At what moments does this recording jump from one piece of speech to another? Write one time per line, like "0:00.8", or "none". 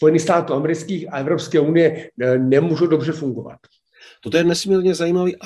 none